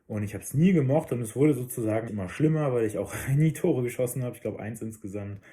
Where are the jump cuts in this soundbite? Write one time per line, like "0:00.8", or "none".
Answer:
0:02.1